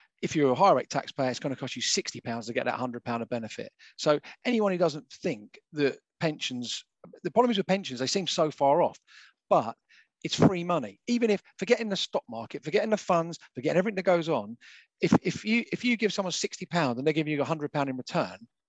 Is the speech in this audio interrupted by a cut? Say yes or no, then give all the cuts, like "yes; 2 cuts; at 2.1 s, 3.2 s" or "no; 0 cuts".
no; 0 cuts